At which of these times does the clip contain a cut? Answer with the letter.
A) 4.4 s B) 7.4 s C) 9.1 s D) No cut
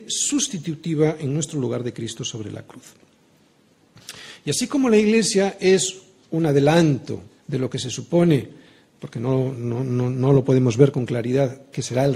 B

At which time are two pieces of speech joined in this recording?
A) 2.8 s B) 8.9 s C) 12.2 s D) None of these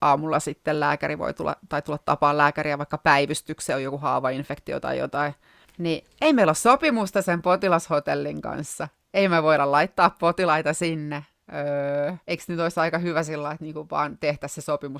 C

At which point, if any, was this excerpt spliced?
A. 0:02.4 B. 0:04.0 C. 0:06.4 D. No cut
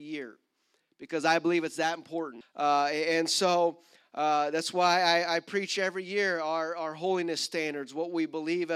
A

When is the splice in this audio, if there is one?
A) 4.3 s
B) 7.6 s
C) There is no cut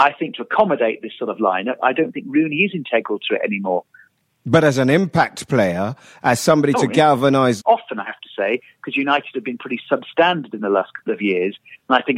B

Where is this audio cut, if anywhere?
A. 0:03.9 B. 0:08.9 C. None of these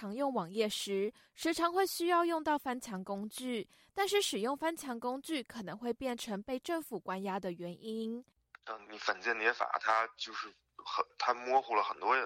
B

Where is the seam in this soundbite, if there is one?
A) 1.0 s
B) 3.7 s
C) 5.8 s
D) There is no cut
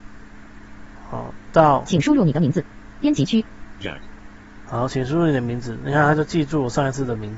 D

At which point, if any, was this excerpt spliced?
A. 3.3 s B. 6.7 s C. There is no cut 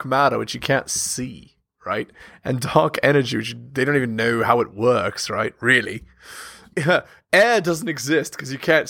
B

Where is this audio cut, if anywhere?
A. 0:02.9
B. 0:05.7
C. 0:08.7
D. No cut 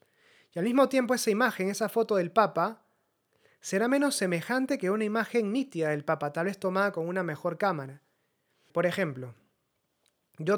C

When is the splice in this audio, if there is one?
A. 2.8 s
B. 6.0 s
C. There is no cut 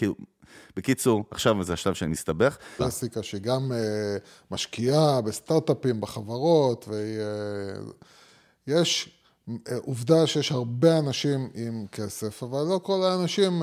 A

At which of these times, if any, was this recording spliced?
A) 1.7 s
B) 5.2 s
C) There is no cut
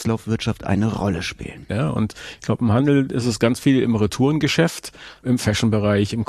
A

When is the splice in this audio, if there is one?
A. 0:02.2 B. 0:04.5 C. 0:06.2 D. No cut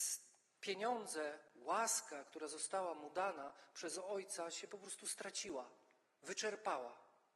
D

